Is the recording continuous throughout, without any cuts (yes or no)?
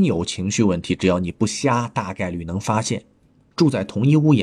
yes